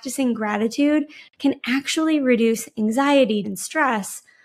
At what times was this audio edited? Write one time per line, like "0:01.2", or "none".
0:03.4

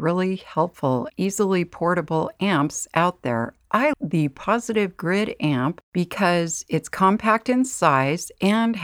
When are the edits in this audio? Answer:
0:01.1
0:03.9

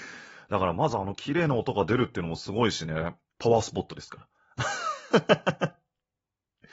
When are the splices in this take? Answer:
0:03.3

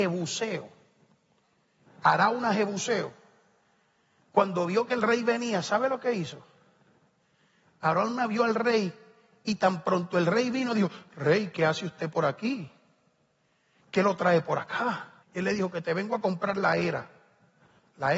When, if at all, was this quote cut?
0:15.2

